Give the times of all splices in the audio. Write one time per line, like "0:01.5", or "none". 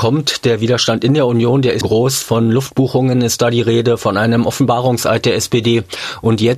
0:01.8